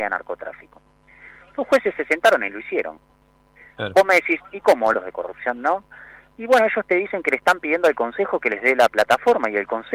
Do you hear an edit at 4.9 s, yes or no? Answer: yes